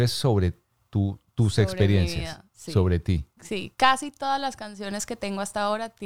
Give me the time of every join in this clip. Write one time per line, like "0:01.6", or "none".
0:03.7